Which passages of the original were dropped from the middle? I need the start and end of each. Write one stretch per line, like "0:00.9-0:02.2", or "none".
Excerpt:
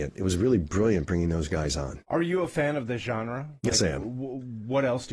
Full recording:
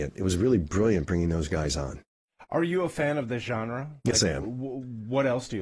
0:02.0-0:02.5

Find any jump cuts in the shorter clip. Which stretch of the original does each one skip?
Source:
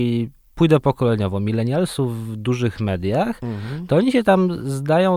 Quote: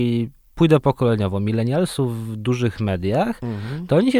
none

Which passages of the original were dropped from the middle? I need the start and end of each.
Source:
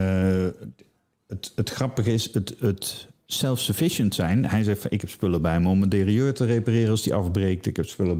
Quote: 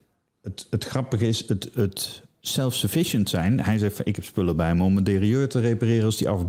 none

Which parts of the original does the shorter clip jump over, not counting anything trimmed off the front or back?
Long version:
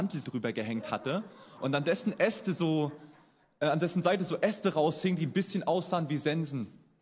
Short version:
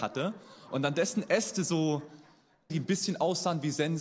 0:03.6-0:05.2

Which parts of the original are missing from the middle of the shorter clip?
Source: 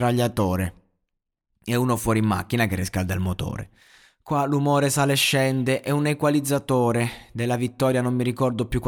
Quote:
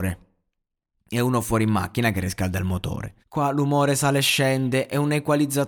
0:03.8-0:04.1

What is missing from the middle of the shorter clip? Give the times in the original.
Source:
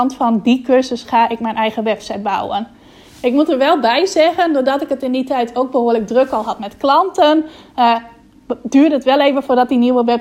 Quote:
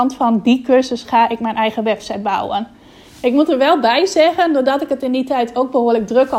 none

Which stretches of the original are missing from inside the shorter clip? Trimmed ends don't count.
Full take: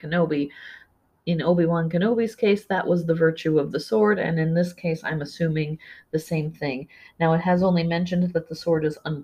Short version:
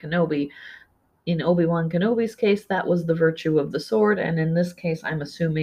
none

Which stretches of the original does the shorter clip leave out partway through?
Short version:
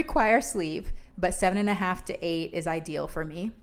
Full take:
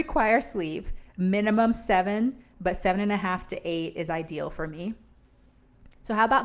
0:01.1-0:02.5

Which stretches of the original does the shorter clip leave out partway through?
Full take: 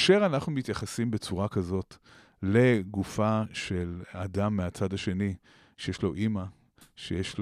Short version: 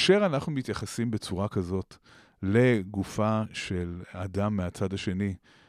none

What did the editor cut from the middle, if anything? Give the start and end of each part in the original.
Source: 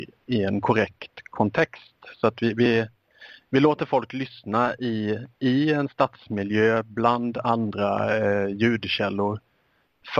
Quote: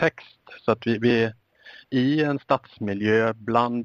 0:03.4-0:05.3

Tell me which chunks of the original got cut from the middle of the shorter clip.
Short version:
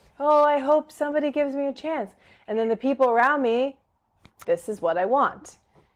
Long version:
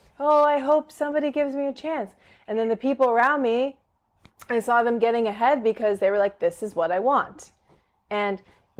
0:04.4-0:06.4

